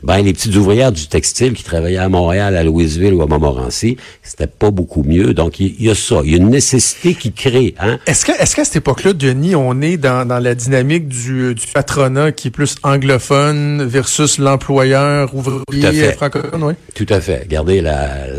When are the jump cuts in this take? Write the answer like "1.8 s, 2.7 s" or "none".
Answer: none